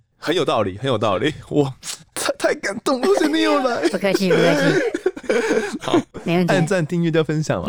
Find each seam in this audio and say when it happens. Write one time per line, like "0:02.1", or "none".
0:03.0
0:05.8